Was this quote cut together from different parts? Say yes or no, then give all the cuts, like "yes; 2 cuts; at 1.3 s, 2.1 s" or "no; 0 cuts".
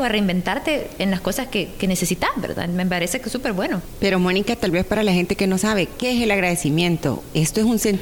no; 0 cuts